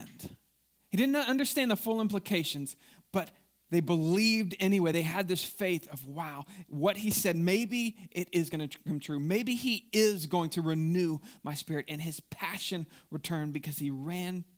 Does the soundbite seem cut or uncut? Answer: uncut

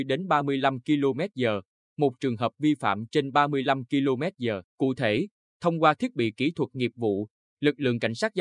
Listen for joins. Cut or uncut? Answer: cut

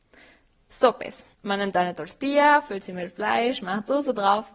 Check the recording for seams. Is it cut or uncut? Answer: cut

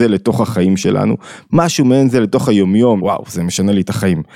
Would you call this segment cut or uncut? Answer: cut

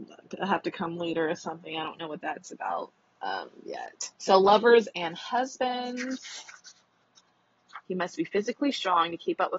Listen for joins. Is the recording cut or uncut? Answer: cut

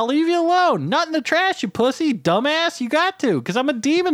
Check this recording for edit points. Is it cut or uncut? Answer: uncut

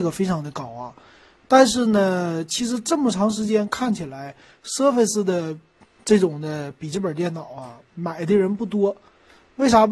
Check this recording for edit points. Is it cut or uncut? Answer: uncut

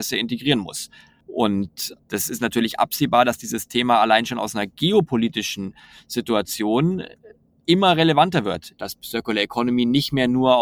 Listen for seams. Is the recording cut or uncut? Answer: cut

